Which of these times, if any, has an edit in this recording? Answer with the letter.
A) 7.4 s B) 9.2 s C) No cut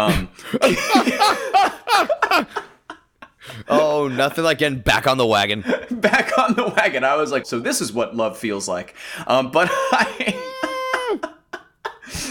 A